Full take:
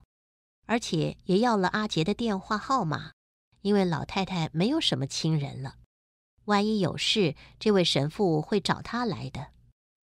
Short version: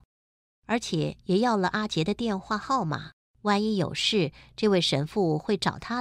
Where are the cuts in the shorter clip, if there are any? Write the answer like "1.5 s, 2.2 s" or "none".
3.3 s